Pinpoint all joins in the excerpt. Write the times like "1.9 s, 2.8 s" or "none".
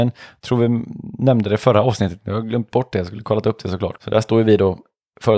4.0 s